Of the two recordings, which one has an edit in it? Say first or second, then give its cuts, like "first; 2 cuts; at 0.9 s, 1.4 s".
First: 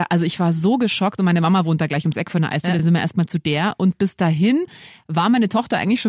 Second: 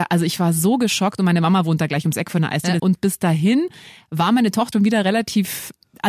second; 2 cuts; at 2.8 s, 4.7 s